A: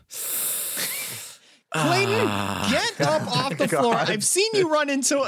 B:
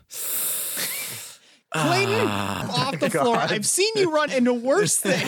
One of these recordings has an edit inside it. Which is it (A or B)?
B